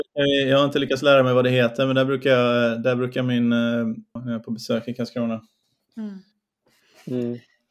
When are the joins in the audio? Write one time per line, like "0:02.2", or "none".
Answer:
0:04.2